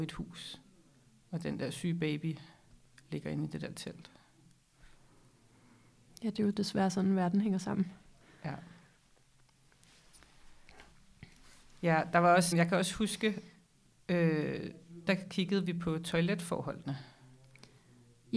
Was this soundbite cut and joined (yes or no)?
yes